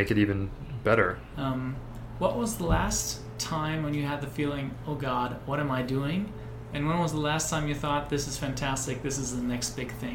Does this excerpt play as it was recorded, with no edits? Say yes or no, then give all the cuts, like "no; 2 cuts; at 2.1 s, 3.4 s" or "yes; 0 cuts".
no; 1 cut; at 1.3 s